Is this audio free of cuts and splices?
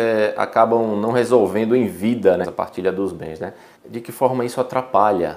no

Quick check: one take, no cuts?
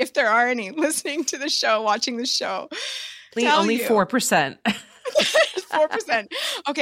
no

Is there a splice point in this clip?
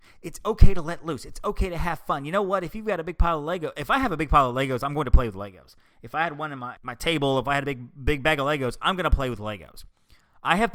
no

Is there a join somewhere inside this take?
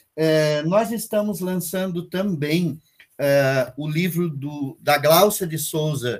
no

